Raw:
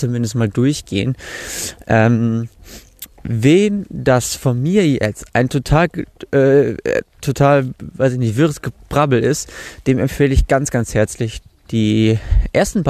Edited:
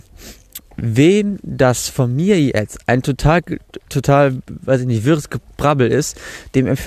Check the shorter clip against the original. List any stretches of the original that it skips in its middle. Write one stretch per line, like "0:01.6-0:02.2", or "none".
0:06.3-0:07.1